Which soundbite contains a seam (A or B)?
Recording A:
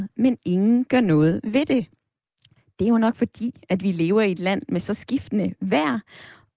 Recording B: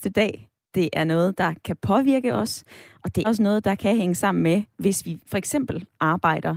B